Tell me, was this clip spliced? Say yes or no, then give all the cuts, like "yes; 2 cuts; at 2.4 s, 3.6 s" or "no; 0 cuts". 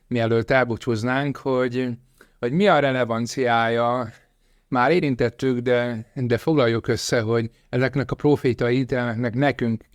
no; 0 cuts